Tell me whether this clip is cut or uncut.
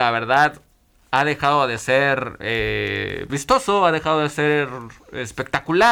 cut